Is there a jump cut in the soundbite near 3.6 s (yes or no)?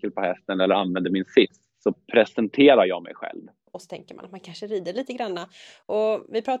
yes